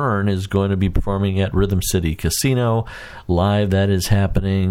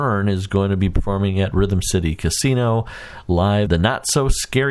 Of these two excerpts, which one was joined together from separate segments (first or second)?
second